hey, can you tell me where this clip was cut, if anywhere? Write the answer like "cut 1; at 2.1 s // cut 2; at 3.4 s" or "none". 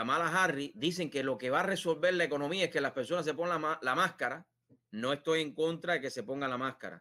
cut 1; at 4.8 s